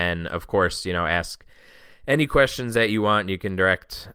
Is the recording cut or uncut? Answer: uncut